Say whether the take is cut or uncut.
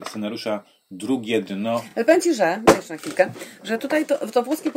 uncut